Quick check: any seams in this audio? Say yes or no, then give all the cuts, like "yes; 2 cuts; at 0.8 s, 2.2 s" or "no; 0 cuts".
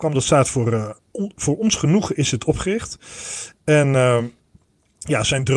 no; 0 cuts